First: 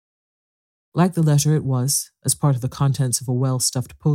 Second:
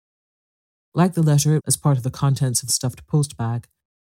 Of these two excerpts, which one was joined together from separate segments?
second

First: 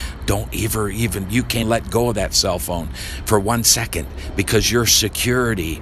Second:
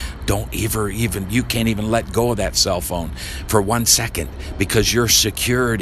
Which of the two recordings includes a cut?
first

